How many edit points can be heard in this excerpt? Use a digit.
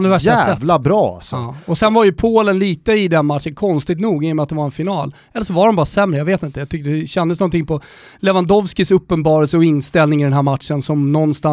0